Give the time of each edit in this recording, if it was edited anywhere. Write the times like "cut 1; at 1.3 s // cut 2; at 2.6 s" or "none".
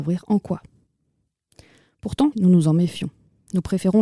cut 1; at 2.3 s